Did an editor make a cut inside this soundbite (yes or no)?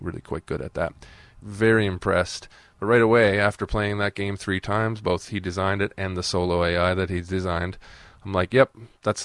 yes